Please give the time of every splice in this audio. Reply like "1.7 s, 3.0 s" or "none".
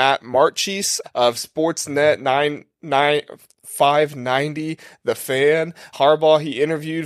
1.0 s, 5.9 s